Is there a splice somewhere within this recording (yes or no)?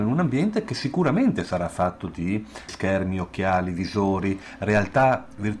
yes